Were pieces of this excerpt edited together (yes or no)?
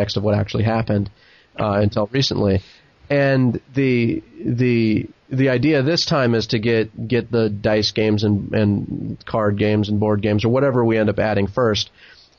no